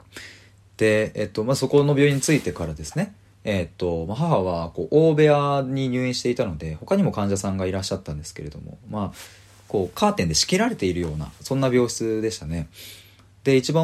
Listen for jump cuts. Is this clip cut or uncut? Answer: uncut